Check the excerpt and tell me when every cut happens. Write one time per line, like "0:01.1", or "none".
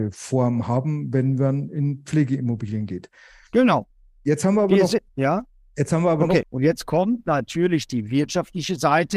0:05.1
0:06.4

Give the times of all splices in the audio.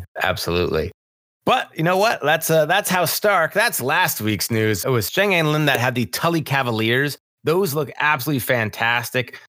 0:04.8

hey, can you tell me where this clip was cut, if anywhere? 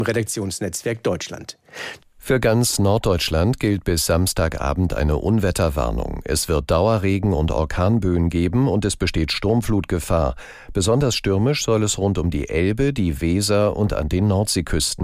0:02.0

